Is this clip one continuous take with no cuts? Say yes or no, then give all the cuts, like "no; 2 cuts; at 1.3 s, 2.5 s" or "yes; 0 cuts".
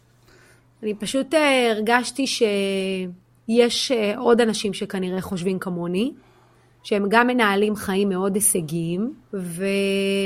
no; 1 cut; at 9.2 s